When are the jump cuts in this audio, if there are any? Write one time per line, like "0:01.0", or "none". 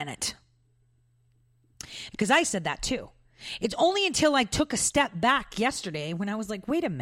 0:02.1